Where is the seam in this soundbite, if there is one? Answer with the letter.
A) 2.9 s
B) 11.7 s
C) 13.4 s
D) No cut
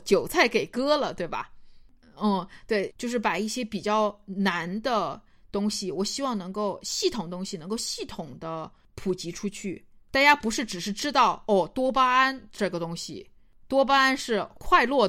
A